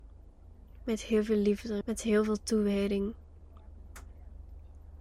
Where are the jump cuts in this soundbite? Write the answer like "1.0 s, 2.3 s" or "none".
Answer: 1.8 s